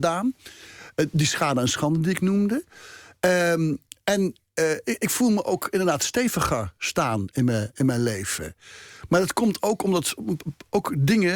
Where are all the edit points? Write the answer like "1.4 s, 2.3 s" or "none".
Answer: none